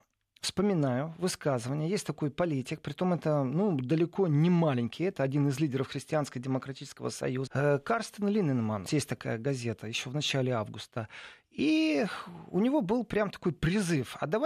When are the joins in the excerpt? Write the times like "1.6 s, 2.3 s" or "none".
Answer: 7.5 s, 8.9 s